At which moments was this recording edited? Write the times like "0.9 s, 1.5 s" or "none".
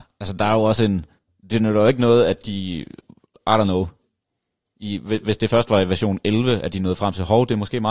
none